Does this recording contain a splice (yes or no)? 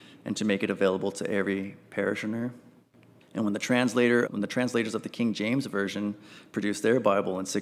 yes